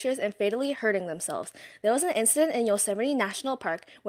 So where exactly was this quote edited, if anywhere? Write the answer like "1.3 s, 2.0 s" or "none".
none